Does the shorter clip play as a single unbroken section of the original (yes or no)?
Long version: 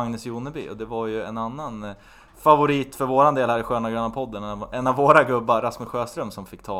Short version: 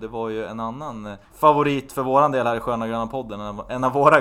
no